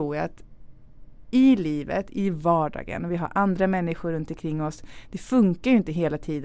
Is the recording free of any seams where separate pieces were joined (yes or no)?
yes